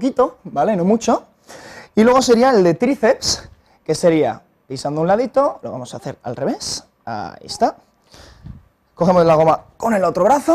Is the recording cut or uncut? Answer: uncut